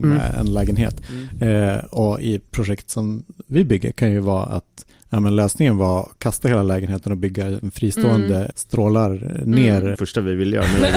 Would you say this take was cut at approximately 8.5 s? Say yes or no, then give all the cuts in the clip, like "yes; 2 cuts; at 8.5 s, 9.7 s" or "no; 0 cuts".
yes; 2 cuts; at 8.5 s, 9.9 s